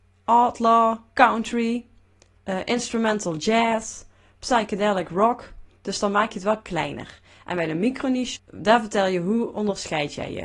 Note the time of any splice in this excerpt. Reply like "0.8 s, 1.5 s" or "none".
8.4 s